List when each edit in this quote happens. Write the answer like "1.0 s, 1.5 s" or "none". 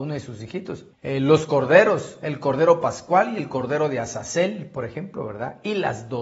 0.9 s

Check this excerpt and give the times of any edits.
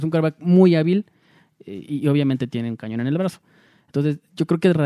none

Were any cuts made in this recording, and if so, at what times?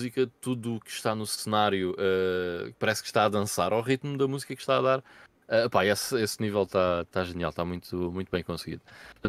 none

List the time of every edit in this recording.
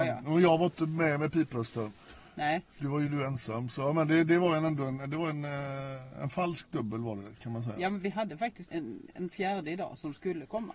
8.7 s

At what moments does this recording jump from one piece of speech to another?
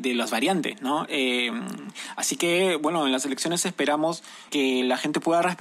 4.5 s

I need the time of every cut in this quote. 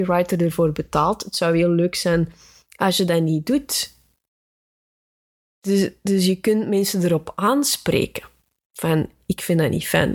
none

